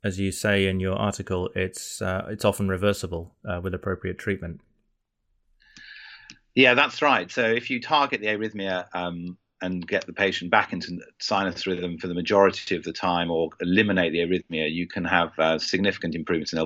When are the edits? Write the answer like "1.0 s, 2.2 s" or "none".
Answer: none